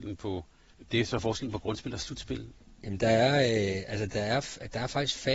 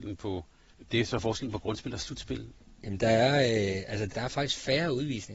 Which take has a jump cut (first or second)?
second